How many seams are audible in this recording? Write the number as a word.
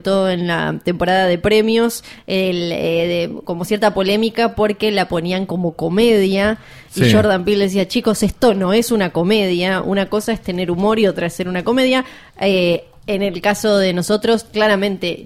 one